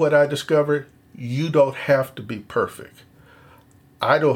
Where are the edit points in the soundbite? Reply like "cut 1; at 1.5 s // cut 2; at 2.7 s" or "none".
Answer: none